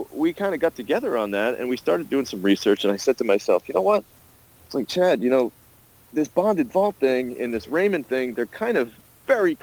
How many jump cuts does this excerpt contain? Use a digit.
0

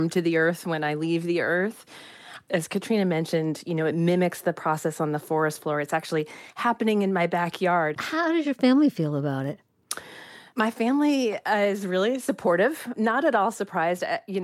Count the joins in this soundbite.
2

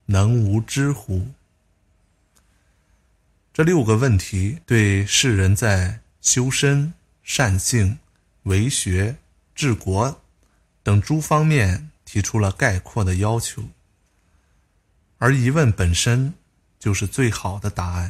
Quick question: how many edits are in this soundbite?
1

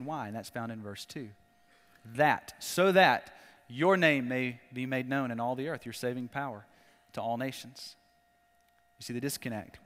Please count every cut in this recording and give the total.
0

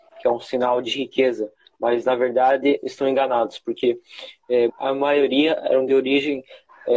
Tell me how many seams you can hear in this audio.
1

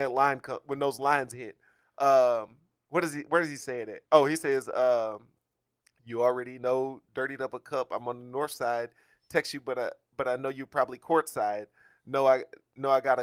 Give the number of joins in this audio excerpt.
1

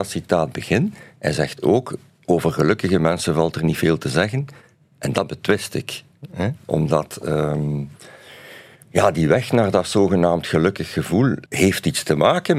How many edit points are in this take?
1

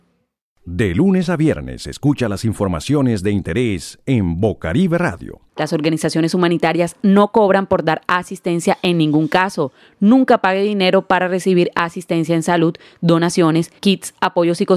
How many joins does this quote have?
1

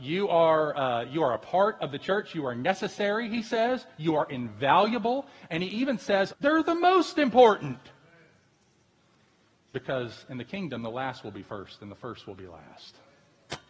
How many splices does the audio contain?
1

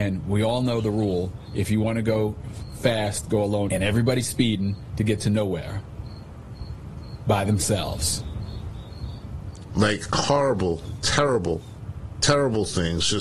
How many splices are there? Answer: 2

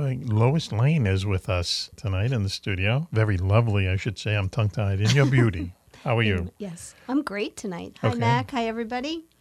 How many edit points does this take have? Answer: 2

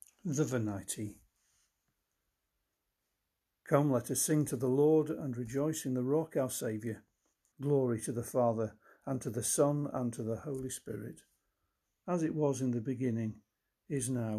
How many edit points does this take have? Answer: 1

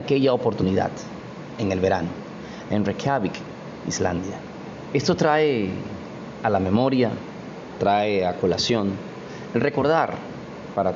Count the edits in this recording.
2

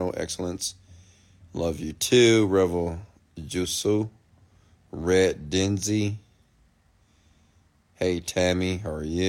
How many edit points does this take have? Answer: 0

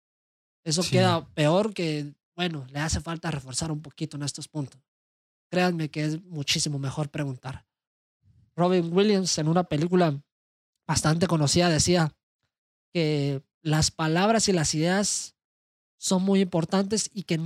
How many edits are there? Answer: 0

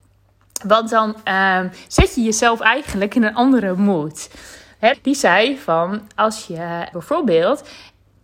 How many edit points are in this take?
2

